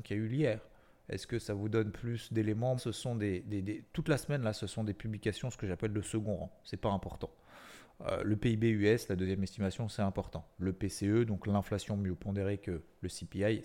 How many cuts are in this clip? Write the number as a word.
one